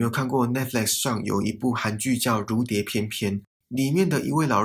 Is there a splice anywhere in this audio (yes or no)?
no